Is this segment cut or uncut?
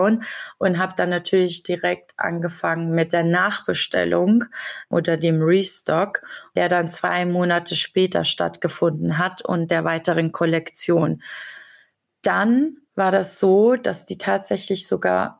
uncut